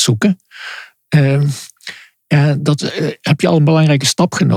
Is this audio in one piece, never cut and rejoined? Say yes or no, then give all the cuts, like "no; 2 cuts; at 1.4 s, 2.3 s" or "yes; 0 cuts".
yes; 0 cuts